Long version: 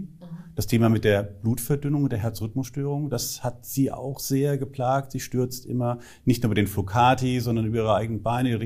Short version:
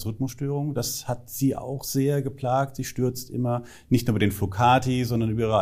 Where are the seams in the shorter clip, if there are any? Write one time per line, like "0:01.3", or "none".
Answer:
none